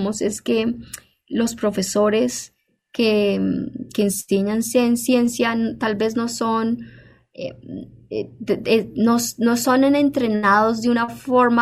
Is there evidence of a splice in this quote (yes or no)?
no